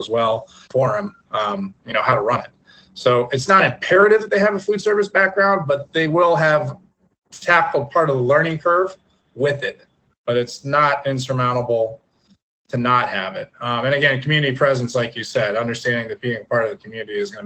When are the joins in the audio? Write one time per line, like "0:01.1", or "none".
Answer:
none